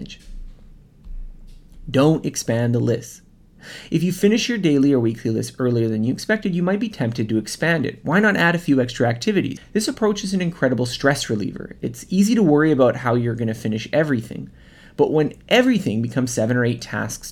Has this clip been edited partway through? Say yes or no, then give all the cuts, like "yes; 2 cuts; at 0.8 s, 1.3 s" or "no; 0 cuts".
yes; 1 cut; at 9.6 s